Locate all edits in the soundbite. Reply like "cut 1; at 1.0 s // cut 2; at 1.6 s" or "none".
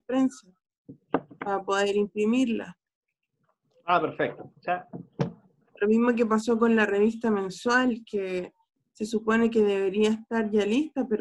none